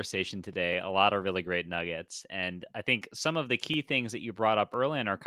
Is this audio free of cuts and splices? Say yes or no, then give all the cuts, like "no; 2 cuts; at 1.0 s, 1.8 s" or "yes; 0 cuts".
yes; 0 cuts